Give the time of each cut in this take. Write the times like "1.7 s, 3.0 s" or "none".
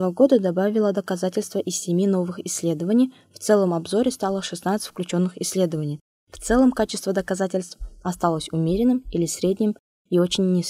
none